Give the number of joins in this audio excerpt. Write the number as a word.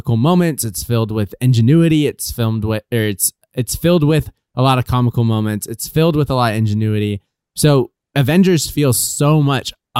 one